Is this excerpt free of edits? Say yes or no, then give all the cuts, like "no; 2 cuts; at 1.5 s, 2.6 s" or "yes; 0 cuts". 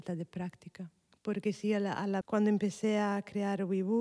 no; 1 cut; at 2.2 s